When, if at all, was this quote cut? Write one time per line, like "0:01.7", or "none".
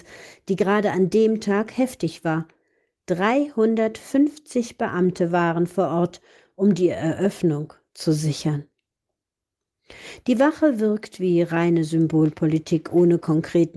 none